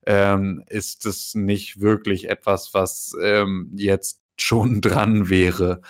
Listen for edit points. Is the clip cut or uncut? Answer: uncut